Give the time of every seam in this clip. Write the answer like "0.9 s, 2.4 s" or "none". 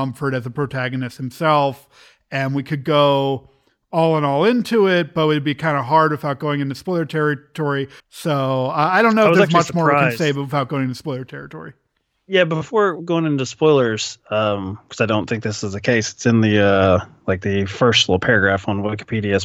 8.0 s